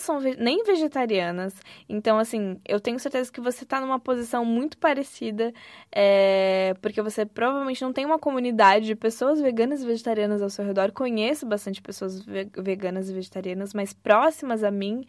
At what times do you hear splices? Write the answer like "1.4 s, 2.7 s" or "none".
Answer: none